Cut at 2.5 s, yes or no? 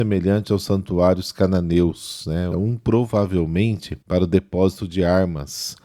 yes